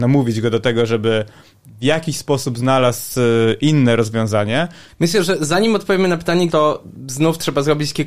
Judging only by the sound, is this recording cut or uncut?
cut